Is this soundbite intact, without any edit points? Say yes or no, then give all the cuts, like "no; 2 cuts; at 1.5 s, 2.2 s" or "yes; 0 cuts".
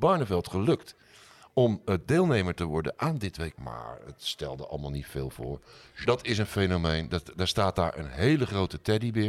no; 2 cuts; at 3.5 s, 6.0 s